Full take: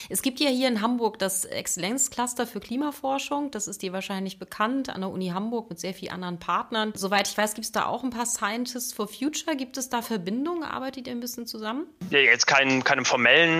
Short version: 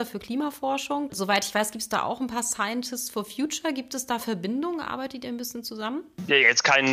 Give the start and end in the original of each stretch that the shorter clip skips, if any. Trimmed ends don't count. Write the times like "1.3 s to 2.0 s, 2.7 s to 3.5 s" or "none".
3.5 s to 6.9 s